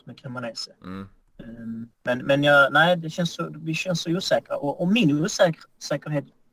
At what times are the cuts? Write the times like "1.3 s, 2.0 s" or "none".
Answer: 1.9 s